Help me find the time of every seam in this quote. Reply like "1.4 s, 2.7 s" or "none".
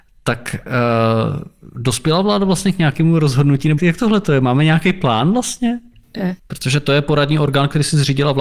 3.8 s, 6.4 s